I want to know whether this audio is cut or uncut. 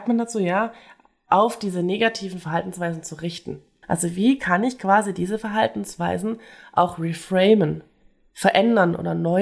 cut